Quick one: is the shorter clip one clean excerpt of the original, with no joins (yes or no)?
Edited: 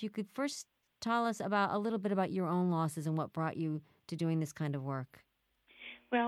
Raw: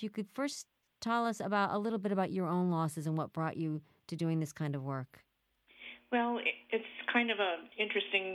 yes